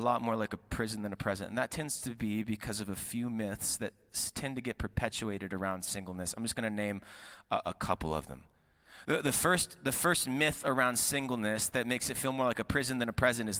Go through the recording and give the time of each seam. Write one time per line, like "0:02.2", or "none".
none